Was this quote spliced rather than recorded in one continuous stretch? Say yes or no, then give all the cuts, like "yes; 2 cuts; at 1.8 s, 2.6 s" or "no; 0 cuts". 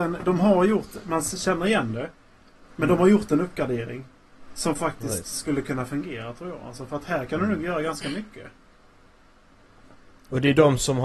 no; 0 cuts